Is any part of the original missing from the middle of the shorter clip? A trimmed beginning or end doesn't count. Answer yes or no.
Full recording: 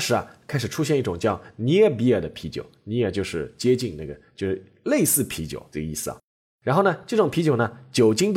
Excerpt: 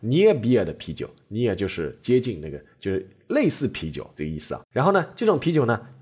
yes